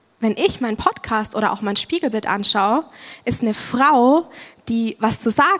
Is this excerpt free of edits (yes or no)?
yes